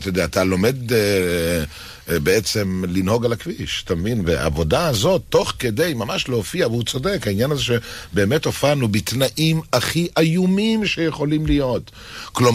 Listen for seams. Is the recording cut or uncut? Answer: uncut